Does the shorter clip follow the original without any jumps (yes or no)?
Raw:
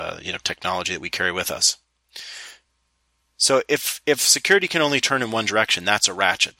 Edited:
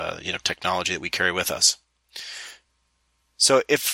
yes